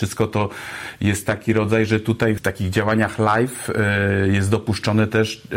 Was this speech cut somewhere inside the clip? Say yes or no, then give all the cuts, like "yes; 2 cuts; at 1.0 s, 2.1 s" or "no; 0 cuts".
yes; 1 cut; at 2.4 s